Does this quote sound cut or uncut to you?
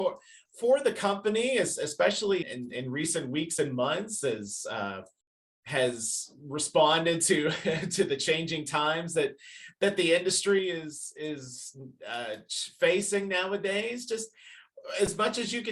cut